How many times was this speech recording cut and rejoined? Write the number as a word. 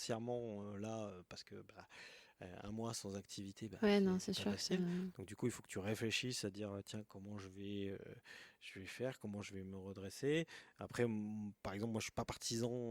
zero